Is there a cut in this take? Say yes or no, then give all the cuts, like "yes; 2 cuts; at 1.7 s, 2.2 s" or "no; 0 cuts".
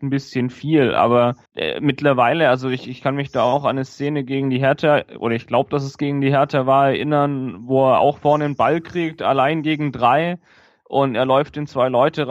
yes; 1 cut; at 1.4 s